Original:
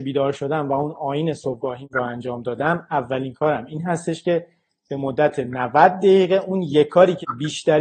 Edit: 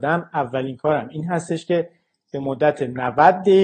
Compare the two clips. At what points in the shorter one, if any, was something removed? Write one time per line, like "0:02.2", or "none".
none